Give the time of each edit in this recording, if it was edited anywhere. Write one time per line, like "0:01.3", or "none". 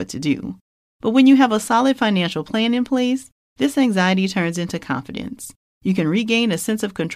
none